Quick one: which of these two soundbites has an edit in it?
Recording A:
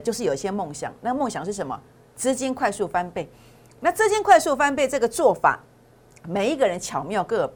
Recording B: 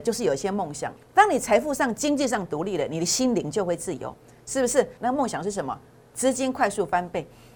B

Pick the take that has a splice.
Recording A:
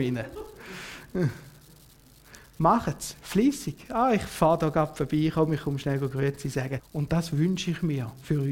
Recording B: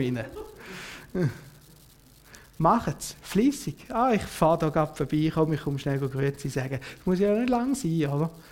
A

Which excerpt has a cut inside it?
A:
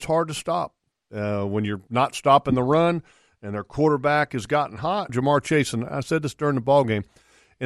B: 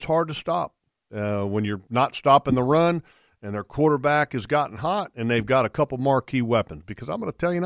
A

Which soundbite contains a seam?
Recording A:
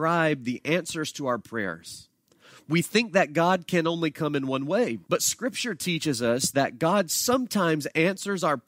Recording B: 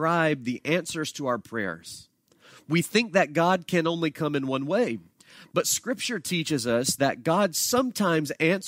A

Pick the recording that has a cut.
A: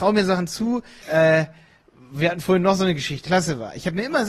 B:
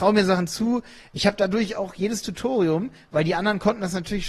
A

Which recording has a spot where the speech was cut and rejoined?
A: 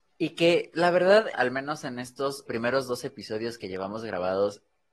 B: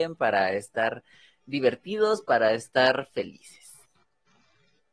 A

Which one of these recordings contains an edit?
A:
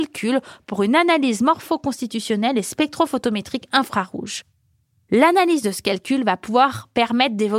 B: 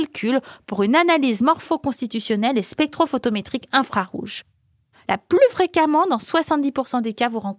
B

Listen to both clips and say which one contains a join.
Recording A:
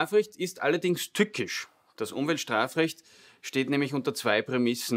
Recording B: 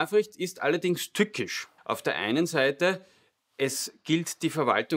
B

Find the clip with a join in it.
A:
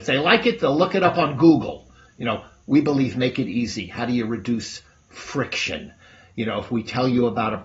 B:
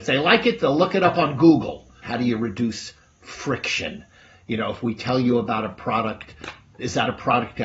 B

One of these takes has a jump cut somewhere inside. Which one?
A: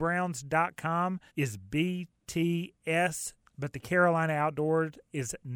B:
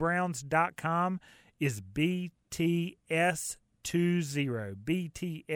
A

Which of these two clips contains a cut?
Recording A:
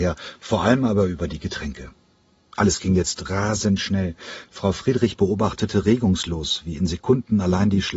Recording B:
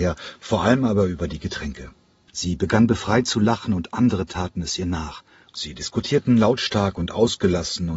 B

